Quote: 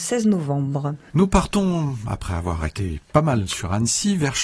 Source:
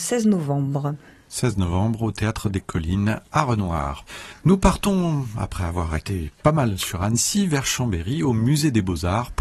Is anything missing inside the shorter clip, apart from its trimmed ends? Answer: yes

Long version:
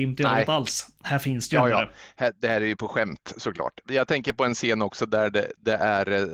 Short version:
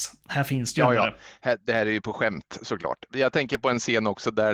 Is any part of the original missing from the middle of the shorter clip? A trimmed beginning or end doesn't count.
no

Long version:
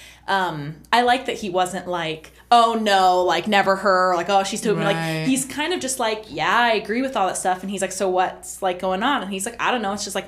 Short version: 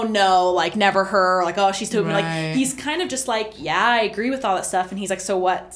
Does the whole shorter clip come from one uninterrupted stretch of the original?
yes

